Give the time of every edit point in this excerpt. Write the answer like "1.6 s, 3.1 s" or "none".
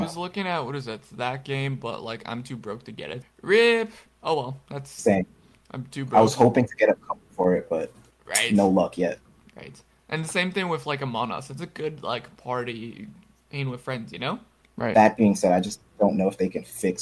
3.2 s, 14.6 s